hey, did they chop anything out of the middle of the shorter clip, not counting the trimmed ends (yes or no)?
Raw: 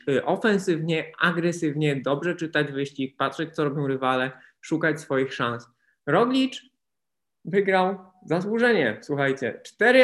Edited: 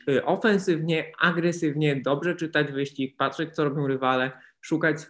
no